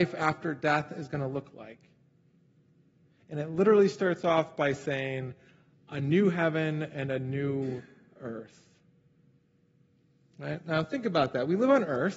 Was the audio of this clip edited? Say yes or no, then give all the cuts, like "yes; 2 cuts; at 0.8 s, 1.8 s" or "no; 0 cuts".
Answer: no; 0 cuts